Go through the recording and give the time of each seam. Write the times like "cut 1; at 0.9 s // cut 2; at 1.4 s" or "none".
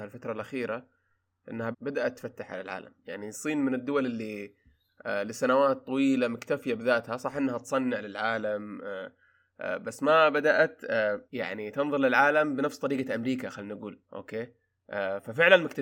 cut 1; at 1.7 s // cut 2; at 11.3 s // cut 3; at 14.0 s